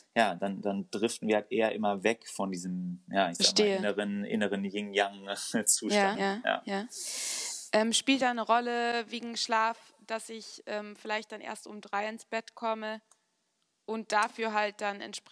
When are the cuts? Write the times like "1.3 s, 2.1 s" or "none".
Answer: 6.1 s